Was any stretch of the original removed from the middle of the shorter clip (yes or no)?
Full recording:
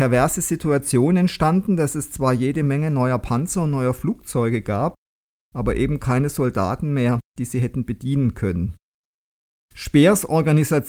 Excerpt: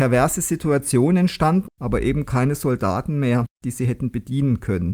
yes